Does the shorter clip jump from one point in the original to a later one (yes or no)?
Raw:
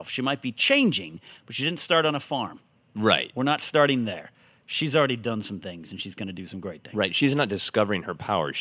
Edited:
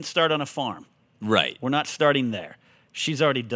no